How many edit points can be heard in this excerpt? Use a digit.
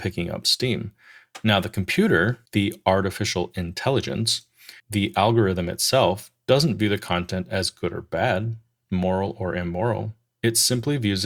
2